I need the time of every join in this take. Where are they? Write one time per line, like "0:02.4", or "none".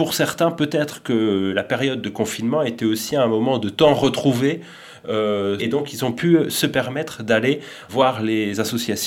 0:05.6
0:07.9